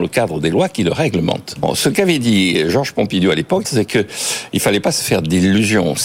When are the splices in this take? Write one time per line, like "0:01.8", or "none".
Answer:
0:01.6
0:03.6